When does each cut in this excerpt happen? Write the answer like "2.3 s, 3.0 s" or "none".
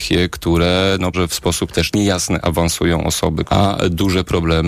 1.1 s, 3.5 s